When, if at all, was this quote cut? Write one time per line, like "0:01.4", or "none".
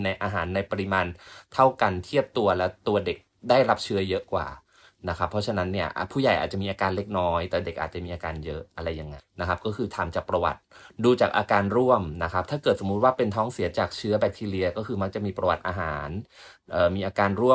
0:09.2